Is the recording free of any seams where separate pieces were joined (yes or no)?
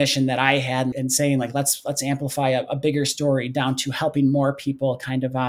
no